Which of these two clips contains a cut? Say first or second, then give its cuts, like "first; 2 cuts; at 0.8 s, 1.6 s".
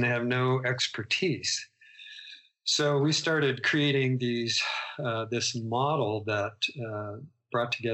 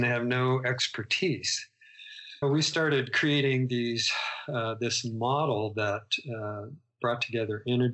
second; 1 cut; at 2.4 s